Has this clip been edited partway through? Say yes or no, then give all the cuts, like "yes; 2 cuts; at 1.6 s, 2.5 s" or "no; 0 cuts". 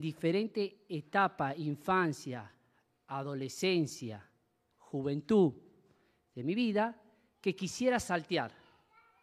no; 0 cuts